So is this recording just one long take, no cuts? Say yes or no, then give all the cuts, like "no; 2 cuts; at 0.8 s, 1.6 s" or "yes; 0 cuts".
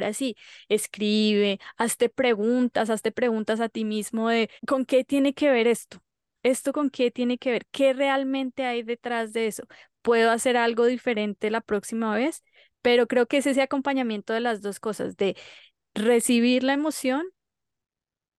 no; 1 cut; at 4.6 s